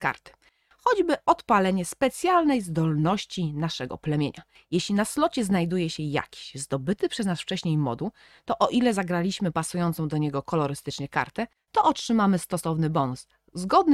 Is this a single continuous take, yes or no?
yes